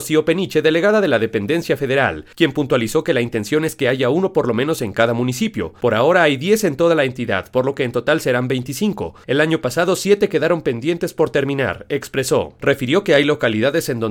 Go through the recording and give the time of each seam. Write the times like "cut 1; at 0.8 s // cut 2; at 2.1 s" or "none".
none